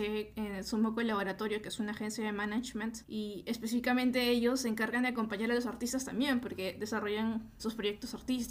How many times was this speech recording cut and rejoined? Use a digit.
1